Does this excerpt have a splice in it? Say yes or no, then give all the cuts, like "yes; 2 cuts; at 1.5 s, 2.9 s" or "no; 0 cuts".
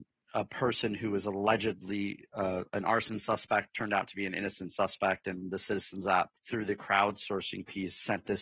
yes; 1 cut; at 6.4 s